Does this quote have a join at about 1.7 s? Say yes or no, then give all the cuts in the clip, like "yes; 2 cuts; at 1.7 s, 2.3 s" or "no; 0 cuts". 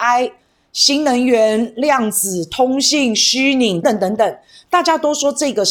no; 1 cut; at 3.8 s